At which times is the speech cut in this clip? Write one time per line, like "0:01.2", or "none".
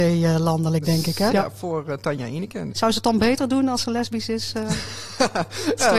0:01.3
0:02.7